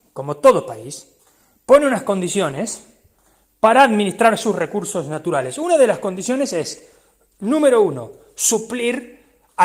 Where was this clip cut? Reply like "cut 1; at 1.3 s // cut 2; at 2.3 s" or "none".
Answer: none